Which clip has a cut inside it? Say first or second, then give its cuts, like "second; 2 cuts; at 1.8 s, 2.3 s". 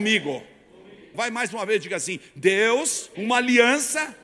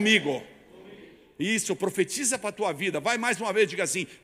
first; 2 cuts; at 1.1 s, 3.1 s